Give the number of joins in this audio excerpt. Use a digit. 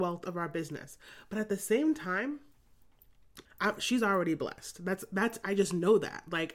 1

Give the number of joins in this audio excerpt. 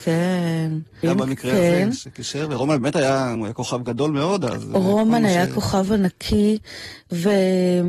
2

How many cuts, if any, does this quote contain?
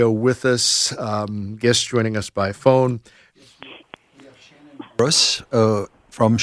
1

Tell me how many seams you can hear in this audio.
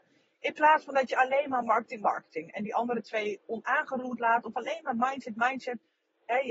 1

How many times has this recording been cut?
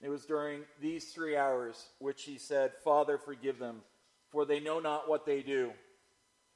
0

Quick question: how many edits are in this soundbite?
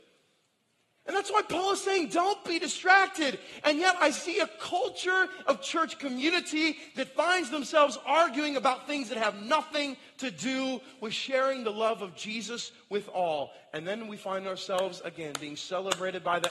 0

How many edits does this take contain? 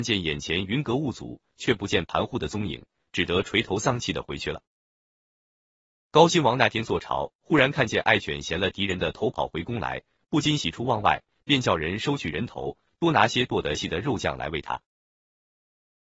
1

